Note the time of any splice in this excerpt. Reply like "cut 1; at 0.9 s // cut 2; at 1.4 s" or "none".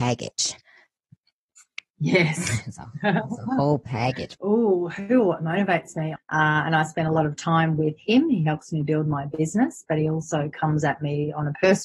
cut 1; at 4.4 s // cut 2; at 6.2 s